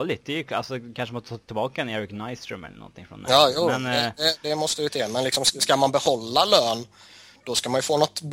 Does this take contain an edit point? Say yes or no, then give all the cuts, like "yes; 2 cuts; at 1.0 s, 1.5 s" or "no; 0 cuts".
no; 0 cuts